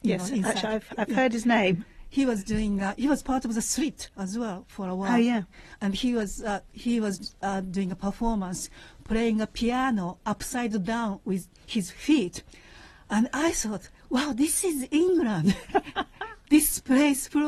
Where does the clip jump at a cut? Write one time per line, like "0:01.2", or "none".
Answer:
0:11.6